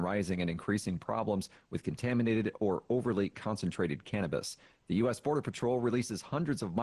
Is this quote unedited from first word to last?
yes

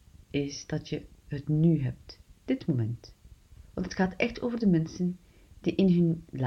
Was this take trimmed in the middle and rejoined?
yes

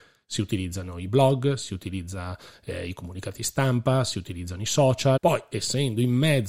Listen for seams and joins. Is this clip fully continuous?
no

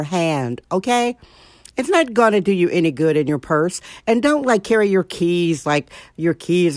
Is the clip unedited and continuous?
yes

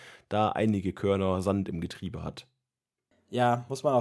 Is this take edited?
no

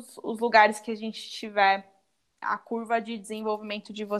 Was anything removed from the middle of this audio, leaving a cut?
yes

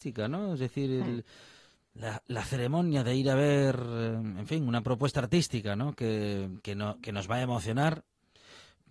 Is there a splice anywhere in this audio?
no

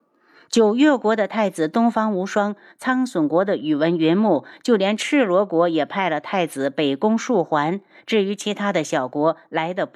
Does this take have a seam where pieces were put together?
no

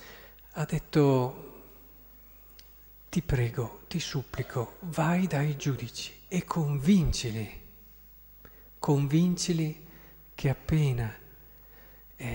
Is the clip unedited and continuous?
yes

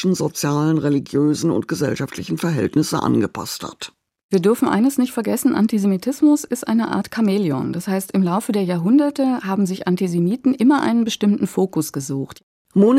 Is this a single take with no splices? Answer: yes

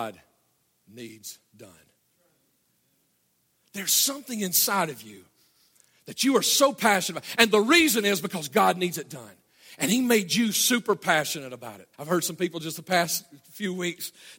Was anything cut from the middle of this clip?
yes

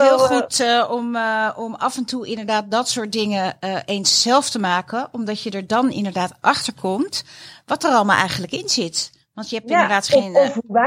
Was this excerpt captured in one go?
yes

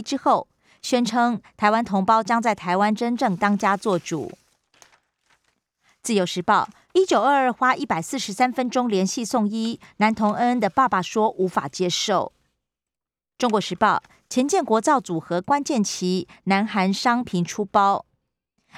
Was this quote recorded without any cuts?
no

